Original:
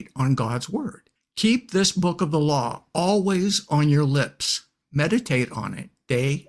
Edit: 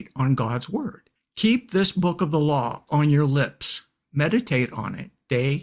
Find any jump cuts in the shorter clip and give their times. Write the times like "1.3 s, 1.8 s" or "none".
2.9 s